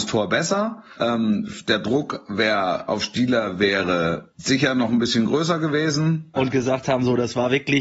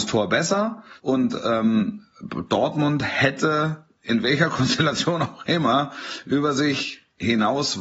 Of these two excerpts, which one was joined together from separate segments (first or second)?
first